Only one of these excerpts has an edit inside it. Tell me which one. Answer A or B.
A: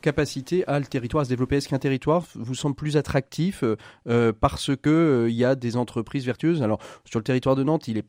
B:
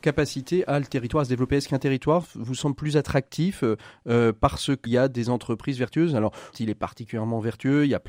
B